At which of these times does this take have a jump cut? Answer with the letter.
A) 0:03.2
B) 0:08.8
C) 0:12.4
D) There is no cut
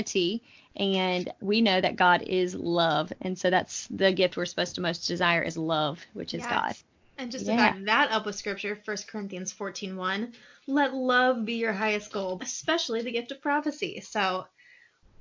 C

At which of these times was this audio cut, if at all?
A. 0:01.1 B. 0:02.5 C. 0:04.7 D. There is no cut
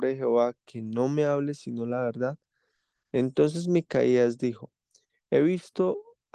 D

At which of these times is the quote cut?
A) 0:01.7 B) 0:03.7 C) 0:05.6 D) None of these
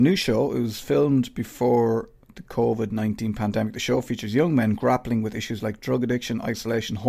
D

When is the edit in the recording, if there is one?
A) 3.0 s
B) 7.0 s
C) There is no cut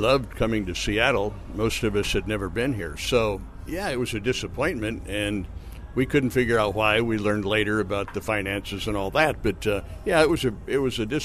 C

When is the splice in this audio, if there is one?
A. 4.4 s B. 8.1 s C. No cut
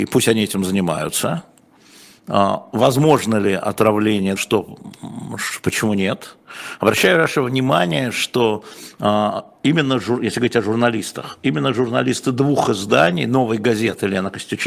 A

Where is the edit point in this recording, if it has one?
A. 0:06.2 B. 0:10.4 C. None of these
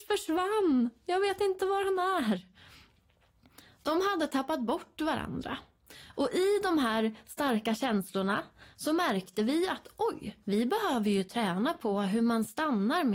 B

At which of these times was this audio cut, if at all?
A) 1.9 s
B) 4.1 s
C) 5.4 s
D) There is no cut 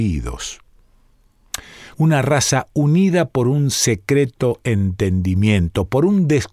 A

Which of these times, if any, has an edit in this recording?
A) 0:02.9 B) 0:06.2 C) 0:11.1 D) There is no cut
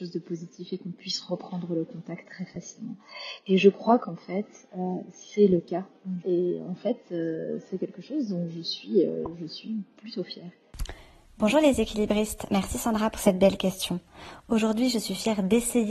B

